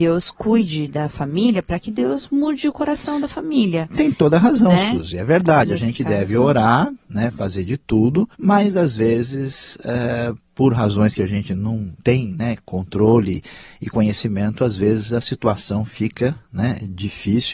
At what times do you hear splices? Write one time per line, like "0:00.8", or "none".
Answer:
0:08.3